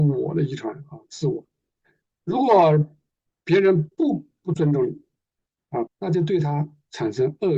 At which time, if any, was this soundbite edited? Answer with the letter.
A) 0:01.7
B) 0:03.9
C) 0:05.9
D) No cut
C